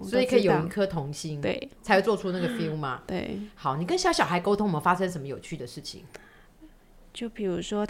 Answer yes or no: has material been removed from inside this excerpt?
no